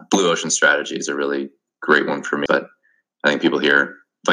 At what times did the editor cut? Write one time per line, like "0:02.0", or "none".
0:02.5